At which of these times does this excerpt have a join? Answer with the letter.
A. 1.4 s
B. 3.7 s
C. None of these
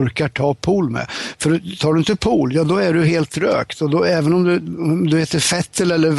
C